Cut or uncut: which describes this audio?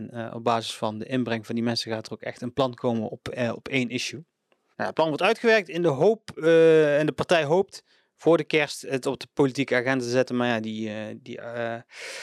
cut